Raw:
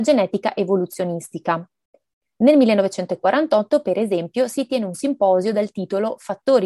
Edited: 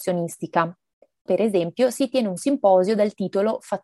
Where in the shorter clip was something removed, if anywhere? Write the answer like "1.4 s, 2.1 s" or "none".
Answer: 1.3 s